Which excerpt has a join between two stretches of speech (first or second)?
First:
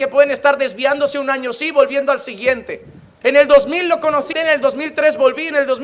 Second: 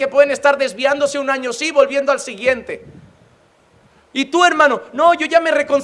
first